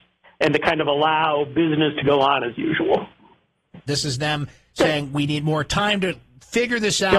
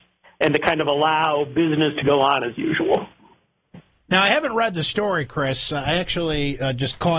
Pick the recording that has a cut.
first; 1 cut; at 3.9 s

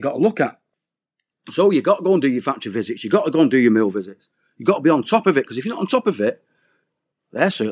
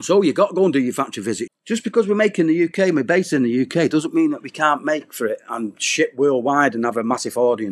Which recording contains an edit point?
second; 1 cut; at 1.5 s

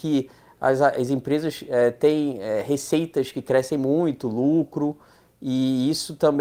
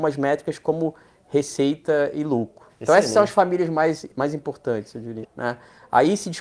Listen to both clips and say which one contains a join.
second; 2 cuts; at 2.7 s, 5.2 s

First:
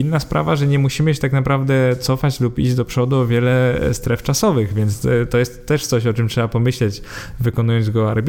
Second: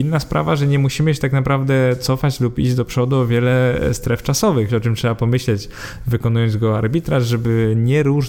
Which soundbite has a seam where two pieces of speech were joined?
second; 1 cut; at 4.7 s

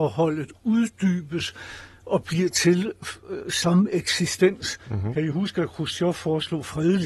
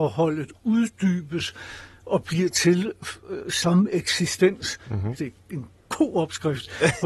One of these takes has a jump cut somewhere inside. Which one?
second; 1 cut; at 5.1 s

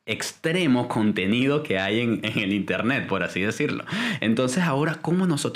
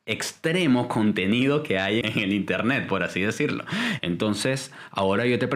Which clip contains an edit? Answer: second; 2 cuts; at 2.0 s, 4.0 s

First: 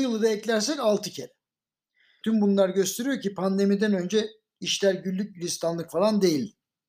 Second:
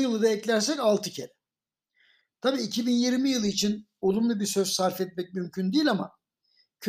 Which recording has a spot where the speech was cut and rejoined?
first; 1 cut; at 2.2 s

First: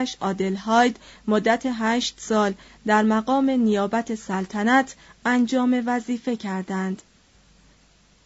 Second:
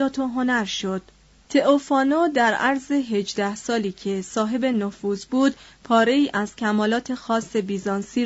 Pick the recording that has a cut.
second; 1 cut; at 1.4 s

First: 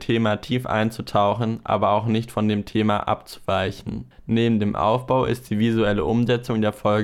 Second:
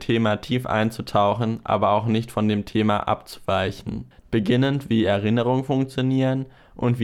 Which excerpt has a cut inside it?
second; 1 cut; at 4.2 s

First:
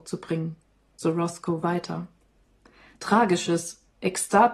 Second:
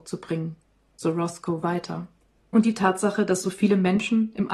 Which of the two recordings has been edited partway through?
second; 1 cut; at 2.4 s

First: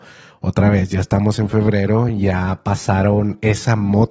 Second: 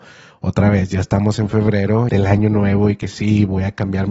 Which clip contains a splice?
second; 1 cut; at 2.1 s

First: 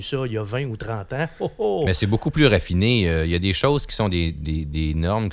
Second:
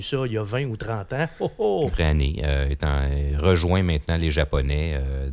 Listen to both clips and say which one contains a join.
second; 1 cut; at 1.9 s

